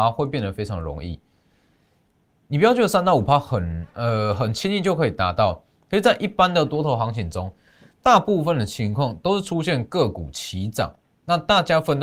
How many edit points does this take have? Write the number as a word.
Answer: zero